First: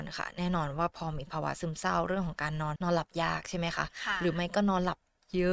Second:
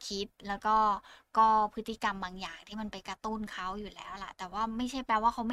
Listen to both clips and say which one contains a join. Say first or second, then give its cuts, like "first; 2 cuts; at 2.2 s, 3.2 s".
first; 1 cut; at 2.8 s